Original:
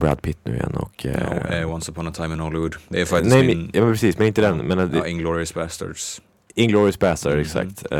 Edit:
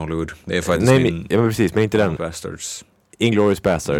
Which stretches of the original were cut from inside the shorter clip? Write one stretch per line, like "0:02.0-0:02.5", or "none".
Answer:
0:04.6-0:05.5